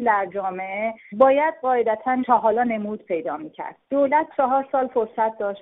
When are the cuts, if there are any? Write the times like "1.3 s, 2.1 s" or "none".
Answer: 3.8 s